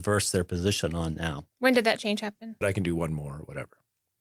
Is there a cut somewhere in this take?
yes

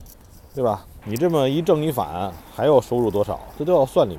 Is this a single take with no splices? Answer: no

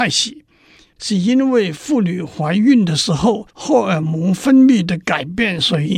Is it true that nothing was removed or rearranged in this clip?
no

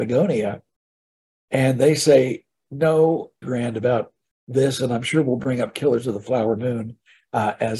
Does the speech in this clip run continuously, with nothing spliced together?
no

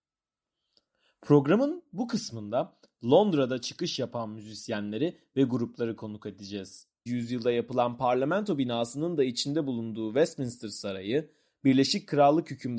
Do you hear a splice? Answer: yes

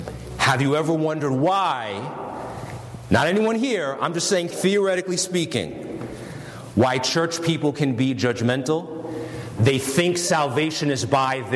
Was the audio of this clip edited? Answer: yes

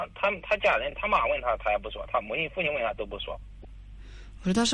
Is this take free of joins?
yes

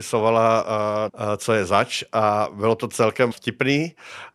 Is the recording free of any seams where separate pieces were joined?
no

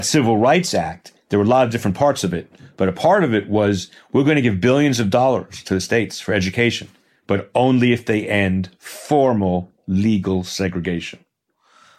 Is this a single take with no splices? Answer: yes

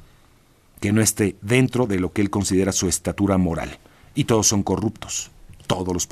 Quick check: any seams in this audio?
no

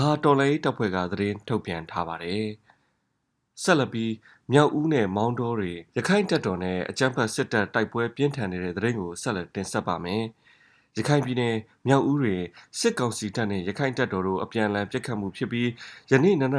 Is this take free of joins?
no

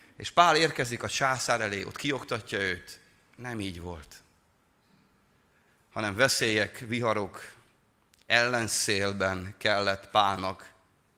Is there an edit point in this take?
no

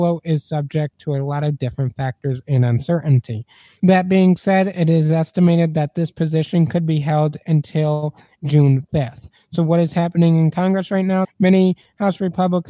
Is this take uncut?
no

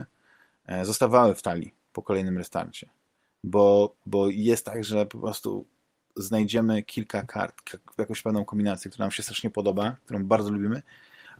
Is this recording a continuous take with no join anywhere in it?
yes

